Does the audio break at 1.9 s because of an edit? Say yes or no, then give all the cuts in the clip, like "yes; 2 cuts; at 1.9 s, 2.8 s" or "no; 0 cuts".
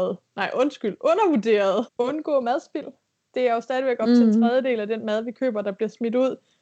yes; 1 cut; at 1.9 s